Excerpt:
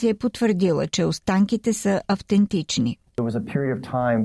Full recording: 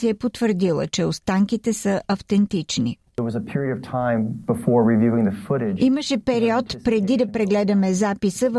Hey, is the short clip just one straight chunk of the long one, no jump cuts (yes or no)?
yes